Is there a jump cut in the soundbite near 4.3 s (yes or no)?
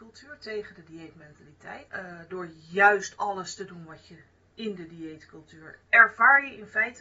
no